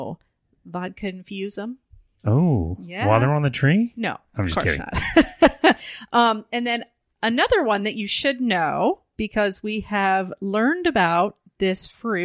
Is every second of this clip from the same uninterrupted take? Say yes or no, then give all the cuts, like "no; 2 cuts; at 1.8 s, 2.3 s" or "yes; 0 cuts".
yes; 0 cuts